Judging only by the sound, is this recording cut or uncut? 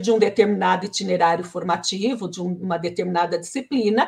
uncut